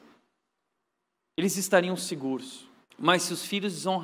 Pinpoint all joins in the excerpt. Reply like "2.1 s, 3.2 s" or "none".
2.8 s